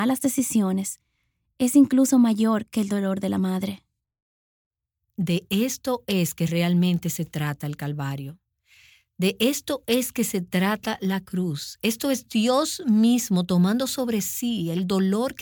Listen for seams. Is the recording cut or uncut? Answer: uncut